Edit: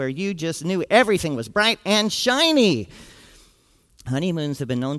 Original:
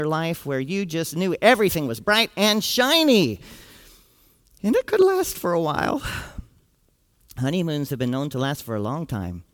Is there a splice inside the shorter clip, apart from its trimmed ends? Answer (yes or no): yes